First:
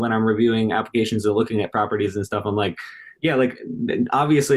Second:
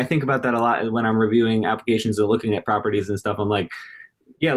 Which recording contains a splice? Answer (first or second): first